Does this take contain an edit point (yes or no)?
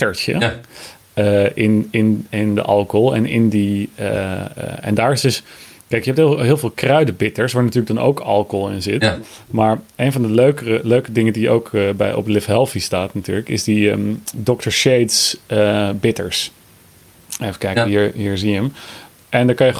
no